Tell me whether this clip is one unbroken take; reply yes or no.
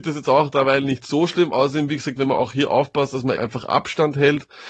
no